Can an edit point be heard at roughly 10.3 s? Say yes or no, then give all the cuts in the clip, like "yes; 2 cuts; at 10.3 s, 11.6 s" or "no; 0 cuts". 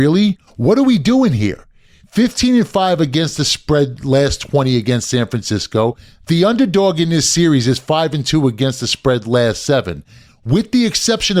yes; 2 cuts; at 2.0 s, 10.3 s